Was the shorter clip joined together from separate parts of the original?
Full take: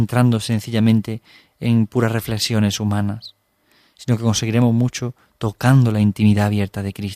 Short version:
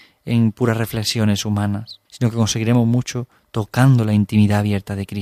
yes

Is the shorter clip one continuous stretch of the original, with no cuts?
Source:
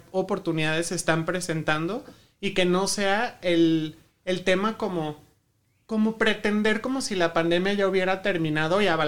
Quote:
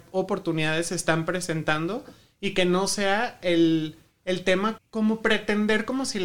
no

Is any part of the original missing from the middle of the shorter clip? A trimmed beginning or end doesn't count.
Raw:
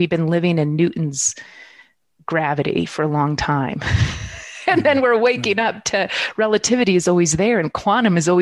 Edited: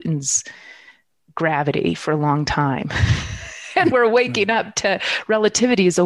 yes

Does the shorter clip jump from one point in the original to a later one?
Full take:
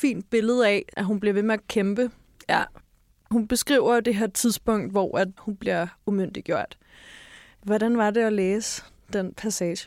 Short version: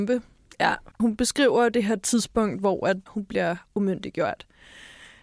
yes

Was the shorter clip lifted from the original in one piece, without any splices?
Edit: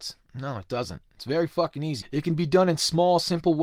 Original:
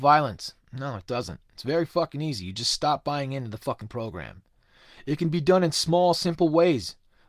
no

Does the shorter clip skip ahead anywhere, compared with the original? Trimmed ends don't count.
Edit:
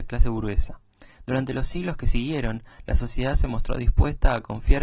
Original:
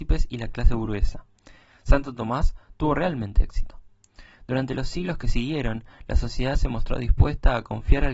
yes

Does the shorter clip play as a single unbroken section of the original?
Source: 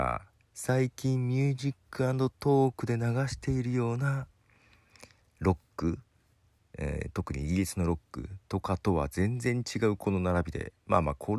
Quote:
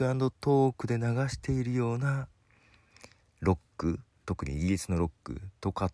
no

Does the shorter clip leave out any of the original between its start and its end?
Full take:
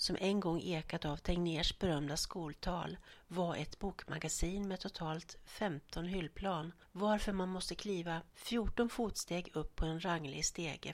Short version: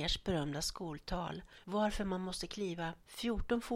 yes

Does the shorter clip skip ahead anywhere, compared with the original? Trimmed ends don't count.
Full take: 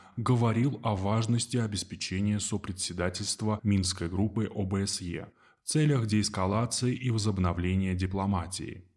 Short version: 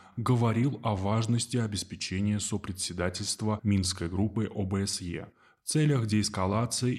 no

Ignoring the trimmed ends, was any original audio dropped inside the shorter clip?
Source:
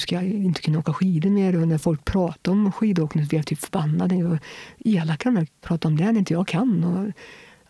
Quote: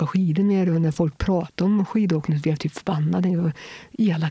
no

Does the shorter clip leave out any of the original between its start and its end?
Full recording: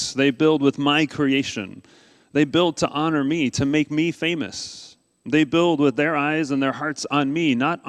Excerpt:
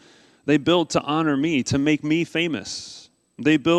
no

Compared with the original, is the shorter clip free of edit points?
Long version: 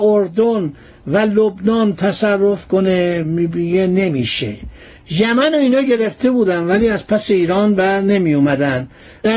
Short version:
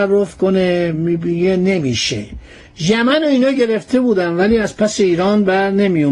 yes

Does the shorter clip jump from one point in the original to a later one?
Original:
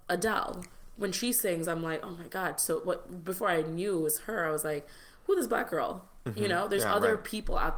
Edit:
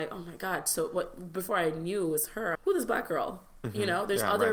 yes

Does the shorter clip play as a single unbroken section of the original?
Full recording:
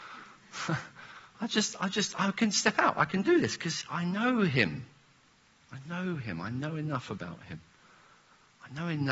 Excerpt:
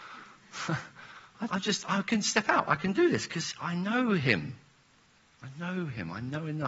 no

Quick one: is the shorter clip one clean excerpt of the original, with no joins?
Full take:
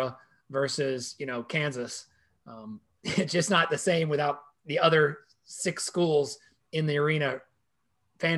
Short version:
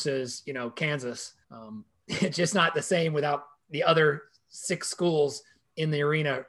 no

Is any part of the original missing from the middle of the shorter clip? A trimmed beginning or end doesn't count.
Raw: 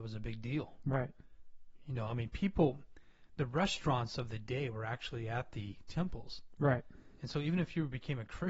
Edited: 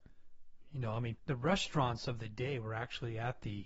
yes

